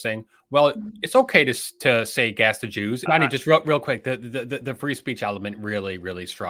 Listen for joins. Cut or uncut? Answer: cut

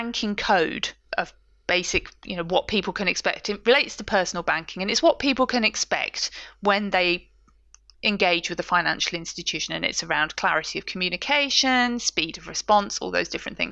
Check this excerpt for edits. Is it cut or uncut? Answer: uncut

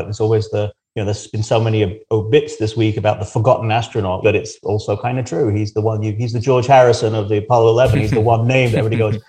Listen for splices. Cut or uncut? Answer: cut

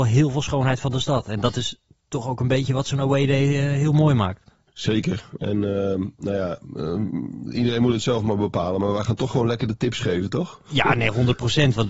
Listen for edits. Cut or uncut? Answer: uncut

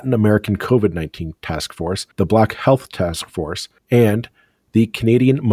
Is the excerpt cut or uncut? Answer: cut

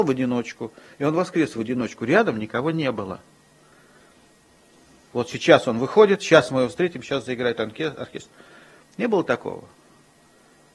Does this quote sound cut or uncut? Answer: cut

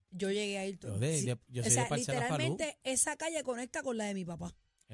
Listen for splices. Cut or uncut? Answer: uncut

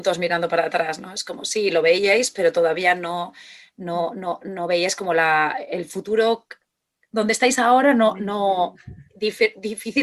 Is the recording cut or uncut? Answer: uncut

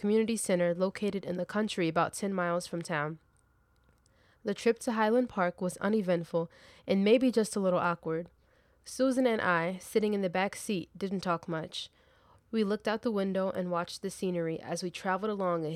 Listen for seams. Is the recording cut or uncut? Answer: uncut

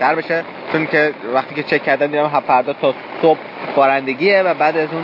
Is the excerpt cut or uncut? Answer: uncut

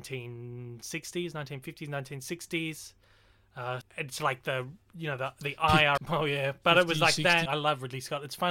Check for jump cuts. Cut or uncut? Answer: cut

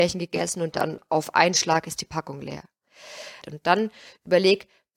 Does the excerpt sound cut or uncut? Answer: cut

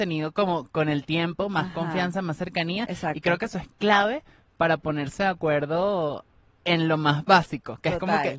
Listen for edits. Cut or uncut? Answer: uncut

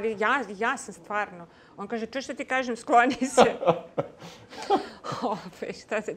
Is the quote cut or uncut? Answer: uncut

